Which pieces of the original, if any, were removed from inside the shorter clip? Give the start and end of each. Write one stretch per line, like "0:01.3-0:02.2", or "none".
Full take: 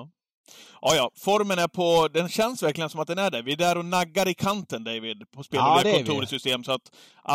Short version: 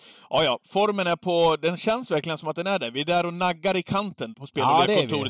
0:04.8-0:05.3